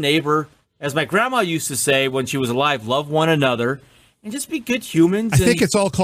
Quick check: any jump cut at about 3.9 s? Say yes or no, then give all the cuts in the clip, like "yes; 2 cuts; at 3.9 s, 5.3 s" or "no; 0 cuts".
no; 0 cuts